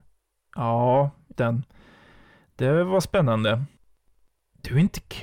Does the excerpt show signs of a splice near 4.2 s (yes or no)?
no